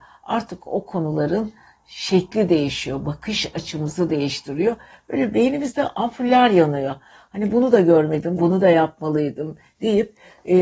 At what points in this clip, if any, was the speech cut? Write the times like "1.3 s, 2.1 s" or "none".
8.4 s